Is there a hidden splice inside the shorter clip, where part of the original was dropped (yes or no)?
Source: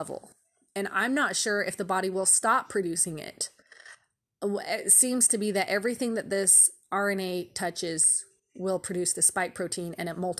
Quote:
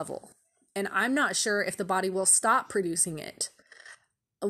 no